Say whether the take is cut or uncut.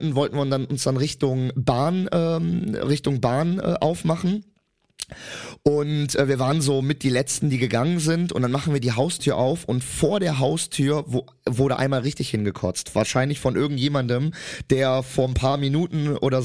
uncut